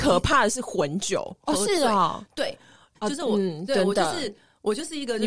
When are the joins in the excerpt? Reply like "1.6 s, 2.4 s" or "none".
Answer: 1.3 s, 3.0 s